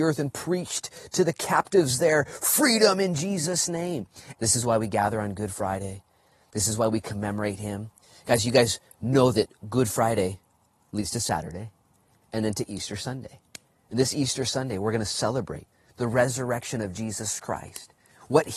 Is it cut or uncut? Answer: cut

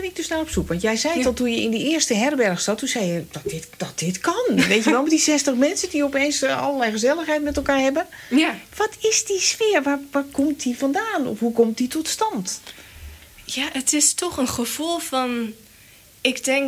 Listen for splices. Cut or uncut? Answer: uncut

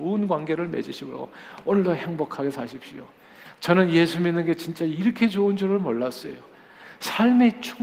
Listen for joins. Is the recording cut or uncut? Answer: cut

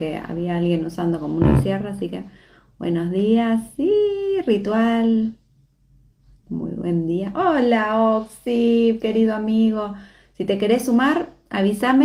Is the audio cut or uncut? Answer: uncut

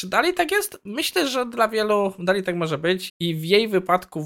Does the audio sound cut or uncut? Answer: cut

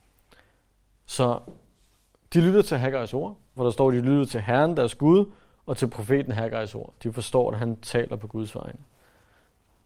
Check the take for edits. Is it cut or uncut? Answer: cut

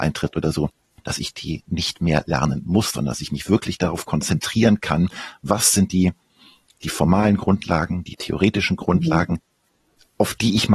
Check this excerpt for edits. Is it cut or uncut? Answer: uncut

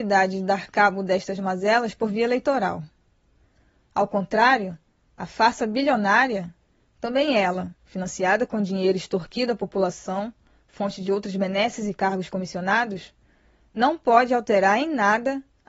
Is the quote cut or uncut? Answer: uncut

